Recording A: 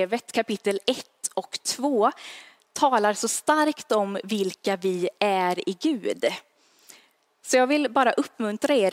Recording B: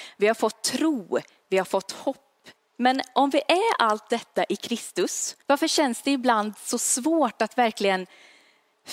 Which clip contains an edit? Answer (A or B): B